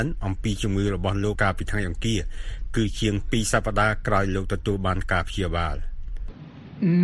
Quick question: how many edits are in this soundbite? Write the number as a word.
one